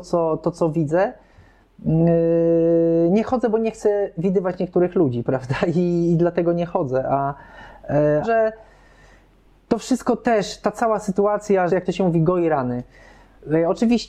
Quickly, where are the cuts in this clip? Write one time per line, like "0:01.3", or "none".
0:08.2
0:11.7